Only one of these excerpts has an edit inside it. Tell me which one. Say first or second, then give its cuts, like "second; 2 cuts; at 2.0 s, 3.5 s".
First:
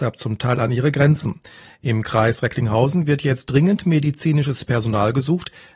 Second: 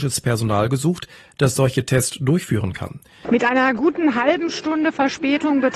second; 1 cut; at 3.2 s